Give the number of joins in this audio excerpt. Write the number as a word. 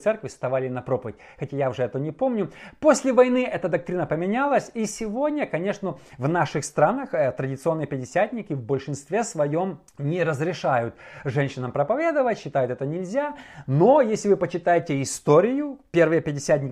one